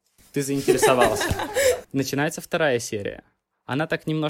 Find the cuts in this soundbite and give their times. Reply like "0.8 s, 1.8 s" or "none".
1.8 s